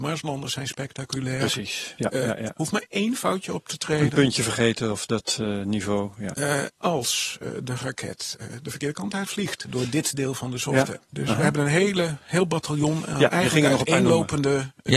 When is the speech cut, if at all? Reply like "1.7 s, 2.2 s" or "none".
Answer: 6.8 s, 11.1 s